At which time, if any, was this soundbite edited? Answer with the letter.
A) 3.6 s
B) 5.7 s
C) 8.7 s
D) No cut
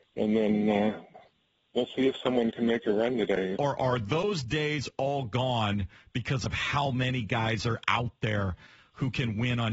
A